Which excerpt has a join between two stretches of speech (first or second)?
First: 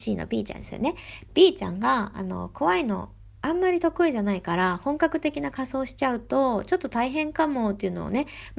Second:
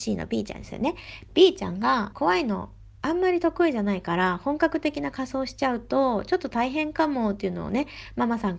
second